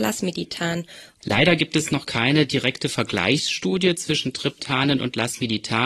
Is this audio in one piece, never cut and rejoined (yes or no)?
no